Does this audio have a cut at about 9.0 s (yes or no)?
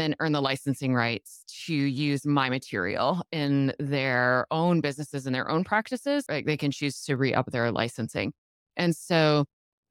no